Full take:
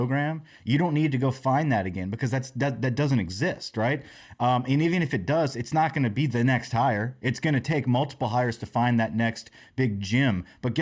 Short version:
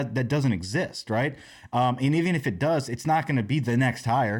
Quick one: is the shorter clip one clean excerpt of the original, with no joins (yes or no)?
yes